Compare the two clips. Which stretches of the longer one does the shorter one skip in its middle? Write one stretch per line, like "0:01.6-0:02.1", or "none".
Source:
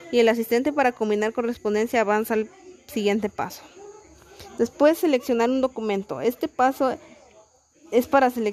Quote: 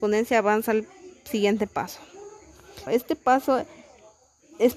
0:04.5-0:06.2